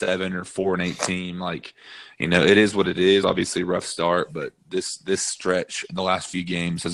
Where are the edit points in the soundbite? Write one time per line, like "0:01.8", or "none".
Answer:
none